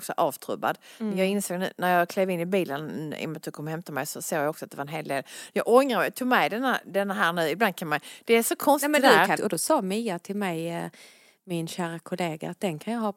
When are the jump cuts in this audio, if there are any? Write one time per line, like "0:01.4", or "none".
0:09.4